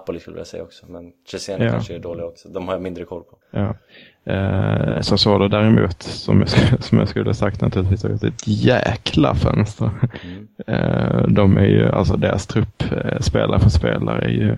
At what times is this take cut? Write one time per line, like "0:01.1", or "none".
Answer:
0:03.4